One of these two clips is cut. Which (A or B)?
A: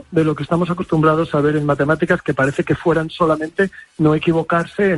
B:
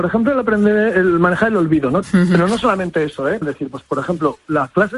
B